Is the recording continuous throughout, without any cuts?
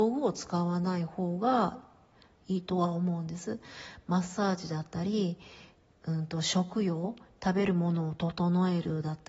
yes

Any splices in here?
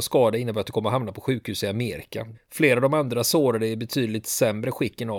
yes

